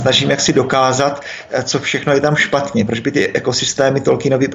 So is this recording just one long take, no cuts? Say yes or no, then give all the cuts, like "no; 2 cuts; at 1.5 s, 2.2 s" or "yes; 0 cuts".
yes; 0 cuts